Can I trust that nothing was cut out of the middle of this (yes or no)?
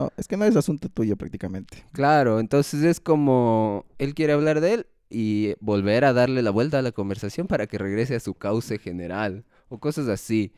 yes